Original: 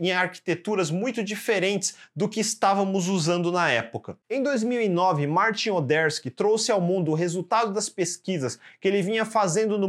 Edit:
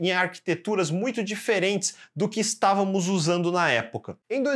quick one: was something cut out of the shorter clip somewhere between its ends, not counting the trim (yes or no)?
no